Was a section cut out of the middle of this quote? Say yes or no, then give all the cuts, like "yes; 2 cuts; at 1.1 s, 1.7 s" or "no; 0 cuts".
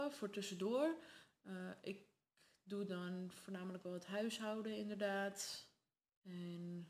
no; 0 cuts